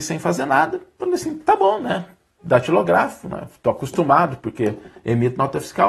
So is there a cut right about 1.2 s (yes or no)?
no